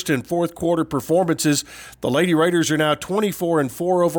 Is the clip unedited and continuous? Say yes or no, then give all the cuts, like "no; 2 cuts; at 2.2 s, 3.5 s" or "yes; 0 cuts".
yes; 0 cuts